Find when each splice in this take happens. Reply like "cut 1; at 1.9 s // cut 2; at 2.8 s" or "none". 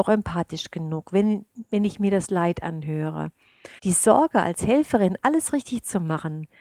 cut 1; at 3.8 s